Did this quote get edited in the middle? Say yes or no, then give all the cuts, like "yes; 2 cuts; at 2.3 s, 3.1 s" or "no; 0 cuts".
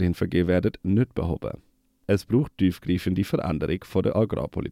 no; 0 cuts